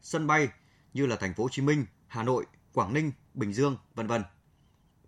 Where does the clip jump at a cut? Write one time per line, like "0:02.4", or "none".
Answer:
0:01.9
0:03.2

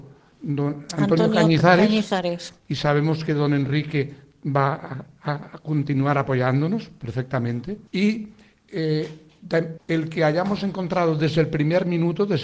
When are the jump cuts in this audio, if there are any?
0:02.6
0:07.9
0:09.8

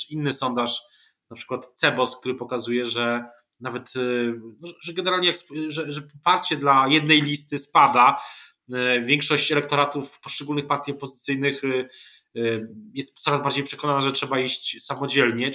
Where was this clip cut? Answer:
none

